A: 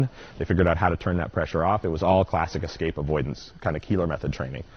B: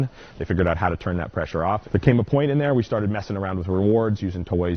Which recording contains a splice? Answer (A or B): B